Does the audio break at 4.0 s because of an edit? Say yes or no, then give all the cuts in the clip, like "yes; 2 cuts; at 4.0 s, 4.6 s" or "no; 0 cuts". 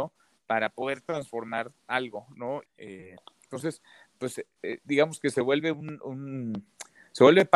no; 1 cut; at 2.6 s